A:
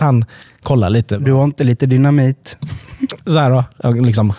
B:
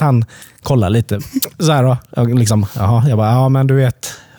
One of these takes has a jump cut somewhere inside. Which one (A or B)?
B